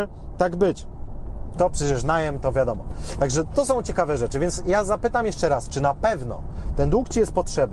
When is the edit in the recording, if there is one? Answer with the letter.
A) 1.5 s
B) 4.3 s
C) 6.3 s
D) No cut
A